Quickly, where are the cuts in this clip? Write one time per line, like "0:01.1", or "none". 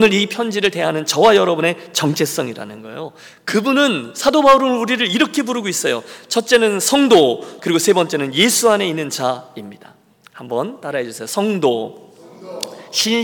0:07.6